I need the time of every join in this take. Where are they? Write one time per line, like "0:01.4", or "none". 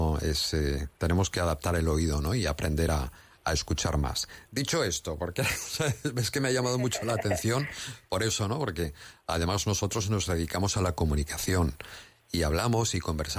none